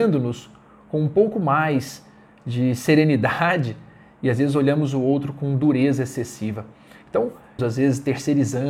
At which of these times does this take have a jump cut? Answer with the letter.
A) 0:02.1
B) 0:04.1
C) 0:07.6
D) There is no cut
C